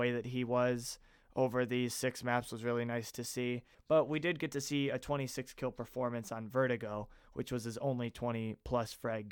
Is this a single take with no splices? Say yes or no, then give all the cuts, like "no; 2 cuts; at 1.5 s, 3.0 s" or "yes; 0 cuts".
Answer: no; 1 cut; at 3.7 s